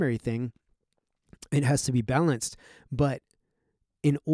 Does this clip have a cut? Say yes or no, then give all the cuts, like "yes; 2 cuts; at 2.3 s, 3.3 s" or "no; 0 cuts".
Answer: no; 0 cuts